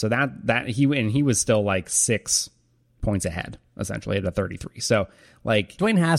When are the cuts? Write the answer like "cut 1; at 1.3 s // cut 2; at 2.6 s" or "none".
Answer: none

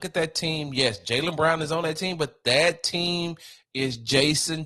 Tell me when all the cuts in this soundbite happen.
none

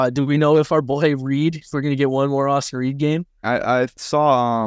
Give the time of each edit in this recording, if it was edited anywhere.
cut 1; at 3.4 s

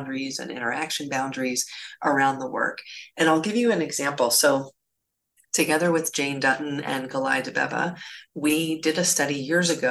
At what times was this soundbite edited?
none

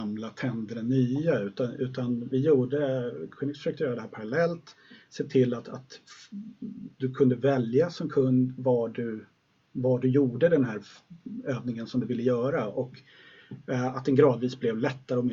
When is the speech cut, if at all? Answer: none

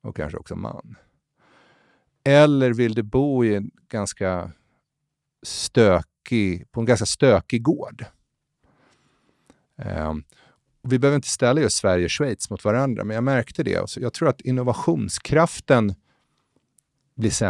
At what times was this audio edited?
cut 1; at 13.9 s

